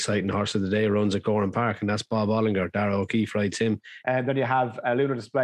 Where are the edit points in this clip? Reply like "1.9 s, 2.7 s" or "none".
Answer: 4.0 s